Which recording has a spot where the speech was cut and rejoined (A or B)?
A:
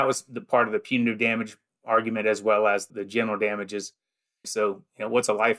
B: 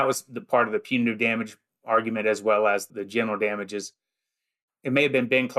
A